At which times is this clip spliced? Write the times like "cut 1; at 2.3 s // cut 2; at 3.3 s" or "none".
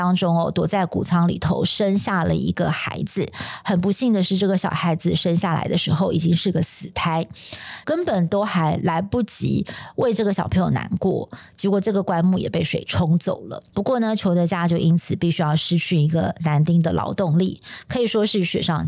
cut 1; at 7.8 s // cut 2; at 13.7 s